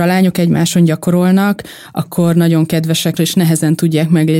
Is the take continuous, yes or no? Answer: no